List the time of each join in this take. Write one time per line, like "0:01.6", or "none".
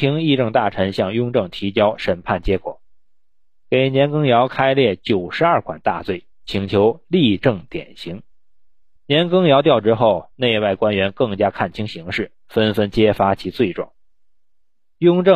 0:09.0